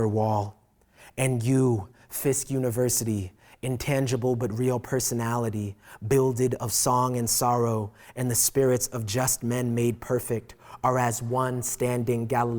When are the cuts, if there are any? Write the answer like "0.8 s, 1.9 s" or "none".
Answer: none

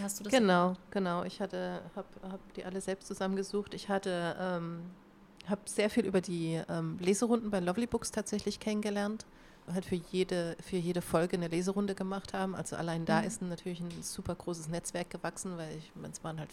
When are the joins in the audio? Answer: 9.7 s

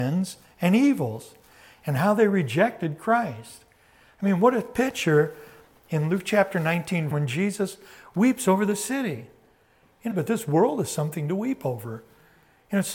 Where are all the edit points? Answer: 7.1 s, 10.1 s

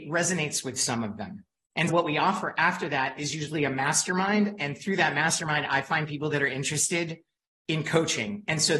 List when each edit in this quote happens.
1.9 s

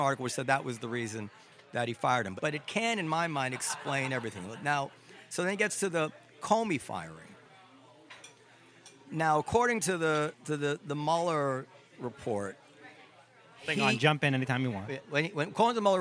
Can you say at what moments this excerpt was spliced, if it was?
2.4 s

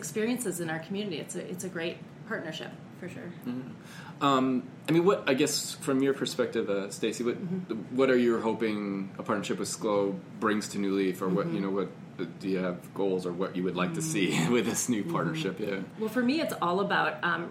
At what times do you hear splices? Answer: none

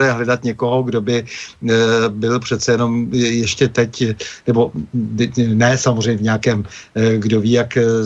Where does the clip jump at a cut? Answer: none

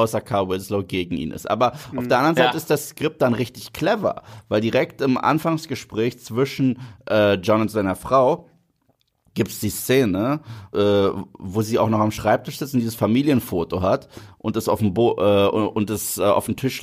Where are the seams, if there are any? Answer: 10.7 s

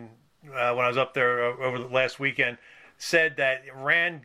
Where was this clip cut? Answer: none

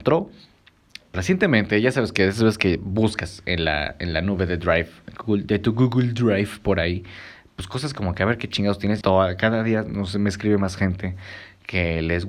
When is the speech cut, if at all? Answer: 1.1 s, 9.0 s

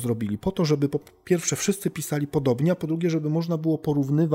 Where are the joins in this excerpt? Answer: none

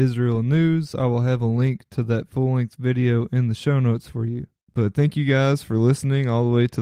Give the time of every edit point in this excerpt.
0.9 s, 4.6 s

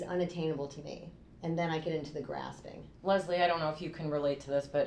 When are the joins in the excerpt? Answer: 1.3 s, 3.0 s

